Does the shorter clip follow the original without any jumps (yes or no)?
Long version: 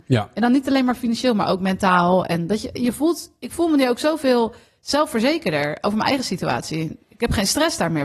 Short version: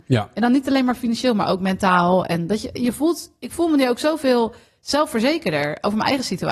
yes